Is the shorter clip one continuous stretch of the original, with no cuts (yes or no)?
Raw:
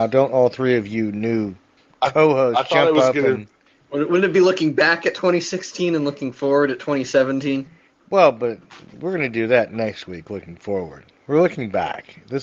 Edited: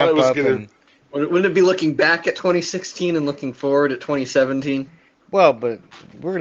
yes